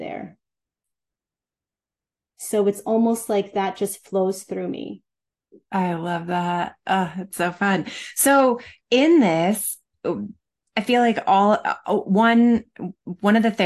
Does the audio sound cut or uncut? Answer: uncut